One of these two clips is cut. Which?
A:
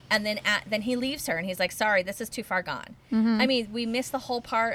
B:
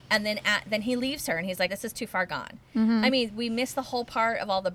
B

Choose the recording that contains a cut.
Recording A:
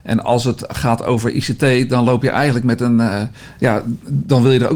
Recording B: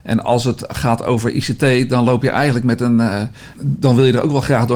B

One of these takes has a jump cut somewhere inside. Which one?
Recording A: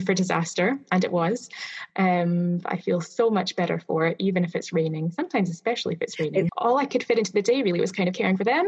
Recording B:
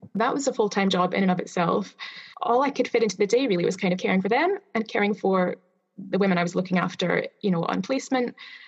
A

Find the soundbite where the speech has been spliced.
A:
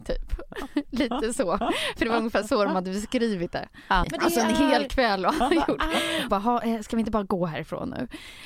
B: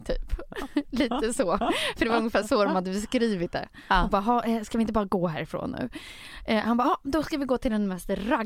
A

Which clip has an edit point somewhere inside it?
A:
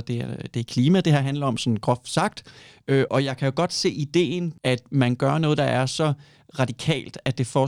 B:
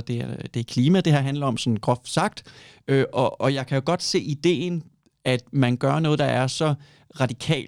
A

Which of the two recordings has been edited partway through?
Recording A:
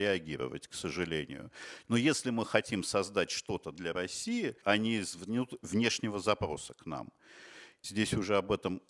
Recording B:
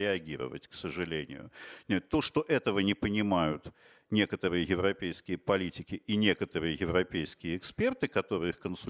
A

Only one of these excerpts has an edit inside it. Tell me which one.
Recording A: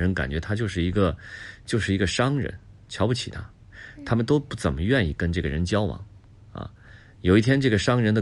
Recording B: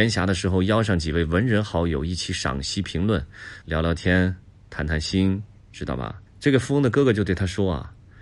B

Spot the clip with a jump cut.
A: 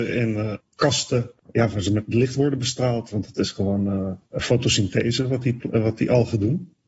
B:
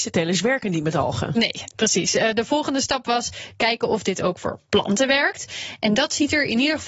A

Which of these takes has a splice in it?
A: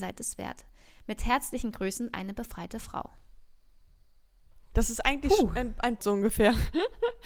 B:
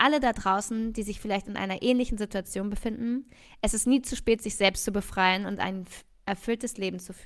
A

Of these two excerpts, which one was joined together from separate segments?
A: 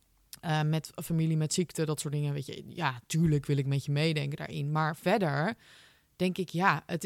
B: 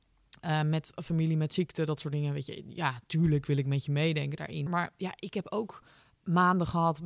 B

